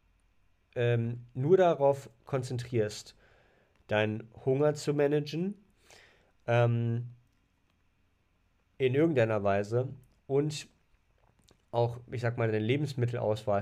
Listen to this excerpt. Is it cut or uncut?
uncut